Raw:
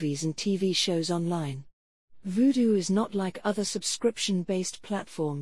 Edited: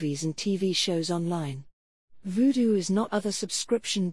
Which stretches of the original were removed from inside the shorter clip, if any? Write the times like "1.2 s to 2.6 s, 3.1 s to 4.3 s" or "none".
3.1 s to 3.4 s